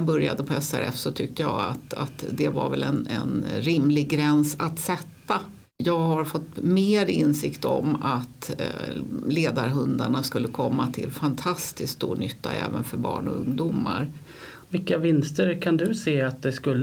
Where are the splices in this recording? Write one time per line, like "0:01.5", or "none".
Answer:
0:05.7
0:14.6